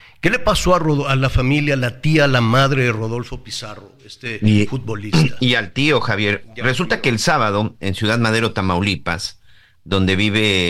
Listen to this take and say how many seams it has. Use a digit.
0